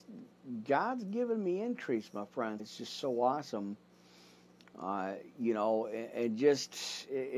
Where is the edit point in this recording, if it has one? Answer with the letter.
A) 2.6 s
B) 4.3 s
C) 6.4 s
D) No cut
A